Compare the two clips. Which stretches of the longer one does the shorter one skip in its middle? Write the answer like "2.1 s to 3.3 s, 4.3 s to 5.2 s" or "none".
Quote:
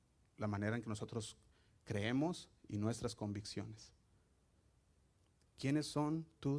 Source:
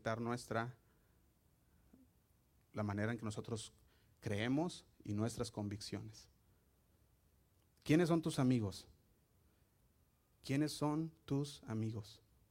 7.8 s to 10.3 s